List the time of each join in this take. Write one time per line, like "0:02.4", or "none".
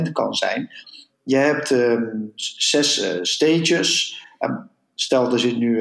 0:01.1

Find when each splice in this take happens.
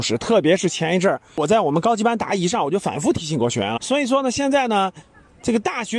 0:03.8

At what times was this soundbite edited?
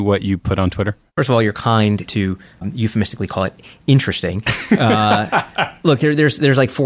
0:02.0

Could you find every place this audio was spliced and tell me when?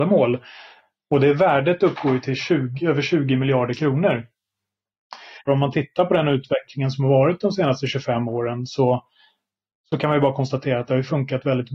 0:05.5

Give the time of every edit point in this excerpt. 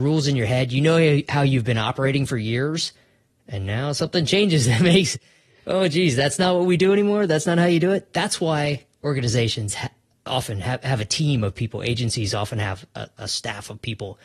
none

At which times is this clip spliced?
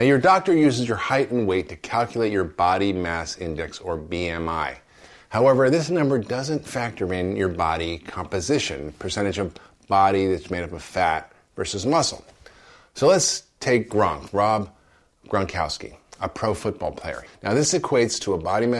0:14.3
0:17.3

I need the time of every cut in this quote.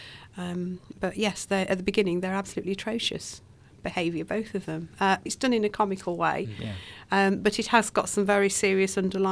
0:05.3

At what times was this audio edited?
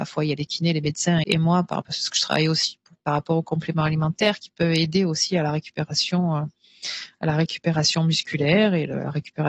0:01.2

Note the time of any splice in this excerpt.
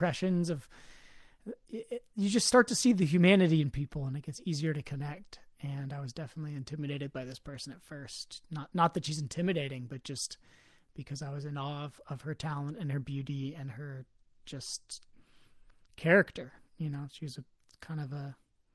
none

